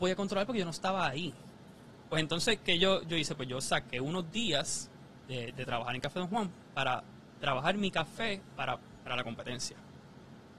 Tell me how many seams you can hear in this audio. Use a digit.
1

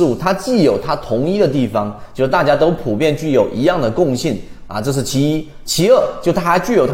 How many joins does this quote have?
0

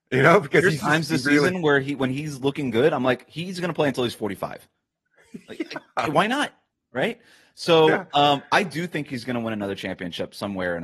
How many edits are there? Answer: 0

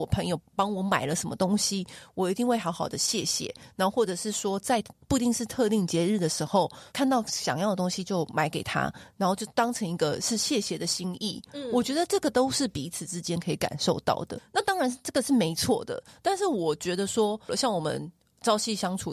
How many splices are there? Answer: 2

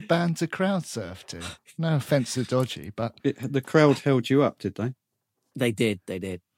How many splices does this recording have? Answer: 1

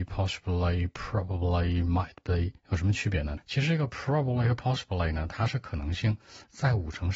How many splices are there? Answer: 1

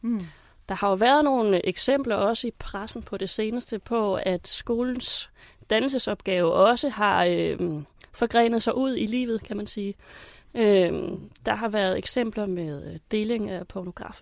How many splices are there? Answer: 0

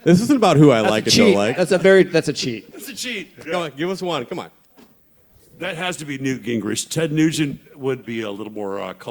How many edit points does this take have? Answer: 2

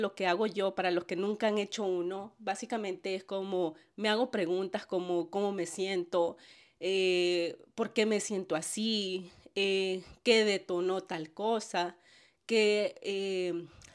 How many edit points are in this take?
0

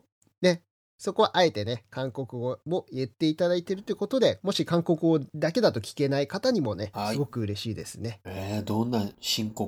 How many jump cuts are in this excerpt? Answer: 2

